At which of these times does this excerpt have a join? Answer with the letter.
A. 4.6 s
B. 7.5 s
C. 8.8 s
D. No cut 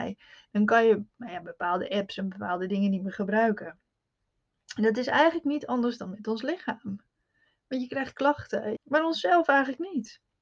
C